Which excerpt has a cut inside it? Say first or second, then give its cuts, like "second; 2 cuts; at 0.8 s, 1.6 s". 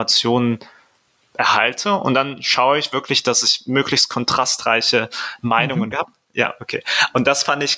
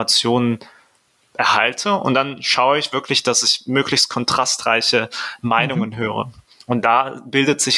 first; 1 cut; at 5.9 s